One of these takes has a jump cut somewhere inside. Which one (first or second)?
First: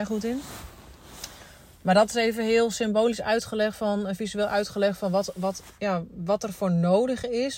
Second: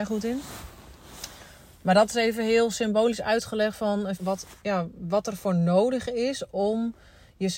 second